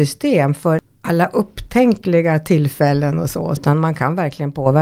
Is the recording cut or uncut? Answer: cut